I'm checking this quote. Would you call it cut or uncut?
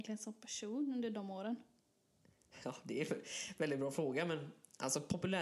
uncut